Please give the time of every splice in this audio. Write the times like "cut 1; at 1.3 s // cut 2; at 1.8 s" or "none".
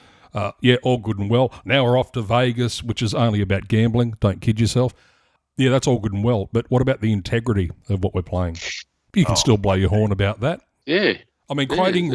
cut 1; at 9.0 s